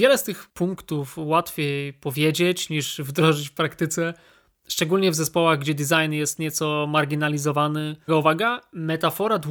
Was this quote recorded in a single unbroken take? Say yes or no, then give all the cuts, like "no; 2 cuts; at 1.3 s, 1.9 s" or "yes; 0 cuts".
no; 1 cut; at 8.1 s